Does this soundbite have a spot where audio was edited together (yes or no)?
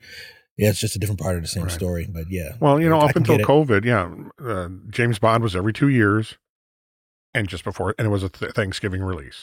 no